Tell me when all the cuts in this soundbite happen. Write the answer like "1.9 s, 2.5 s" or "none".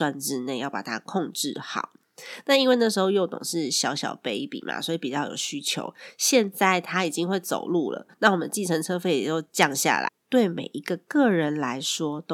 10.1 s